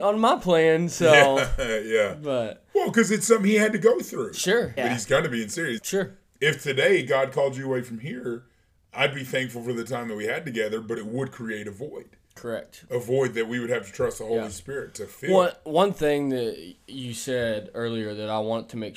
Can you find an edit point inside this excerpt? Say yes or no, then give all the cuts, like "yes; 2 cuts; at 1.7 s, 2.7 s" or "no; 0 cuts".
yes; 2 cuts; at 4.8 s, 5.8 s